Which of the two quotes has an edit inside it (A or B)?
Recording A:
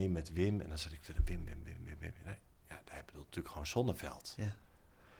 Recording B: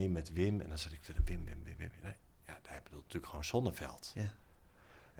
B